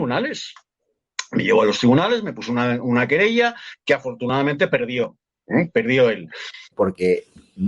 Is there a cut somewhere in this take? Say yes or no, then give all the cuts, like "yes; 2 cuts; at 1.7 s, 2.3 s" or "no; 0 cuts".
yes; 1 cut; at 6.7 s